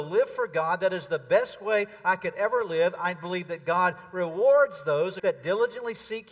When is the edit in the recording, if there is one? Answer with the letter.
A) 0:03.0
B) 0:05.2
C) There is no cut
B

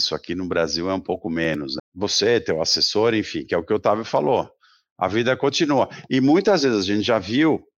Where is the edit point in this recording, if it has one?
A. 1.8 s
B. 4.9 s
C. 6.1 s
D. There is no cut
A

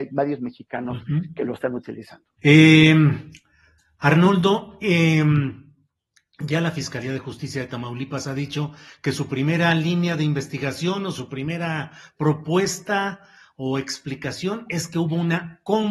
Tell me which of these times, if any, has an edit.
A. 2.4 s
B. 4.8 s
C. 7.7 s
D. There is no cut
A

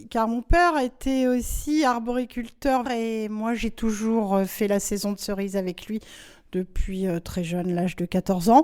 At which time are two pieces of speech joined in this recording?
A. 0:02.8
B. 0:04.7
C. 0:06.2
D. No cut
A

